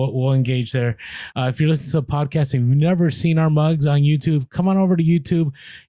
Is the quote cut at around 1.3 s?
yes; 1 cut; at 1.3 s

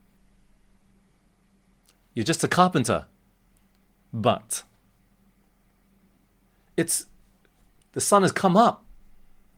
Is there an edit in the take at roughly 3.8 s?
no; 0 cuts

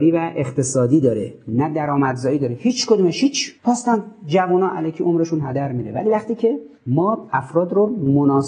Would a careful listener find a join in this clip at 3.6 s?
yes; 2 cuts; at 3.6 s, 6.7 s

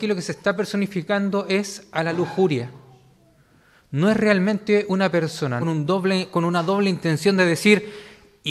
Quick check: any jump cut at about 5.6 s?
yes; 1 cut; at 5.6 s

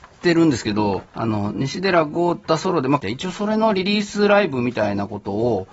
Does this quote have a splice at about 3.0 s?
yes; 2 cuts; at 1.1 s, 3.0 s

